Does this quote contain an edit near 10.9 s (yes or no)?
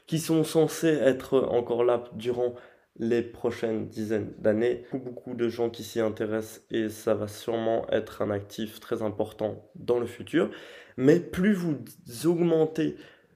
no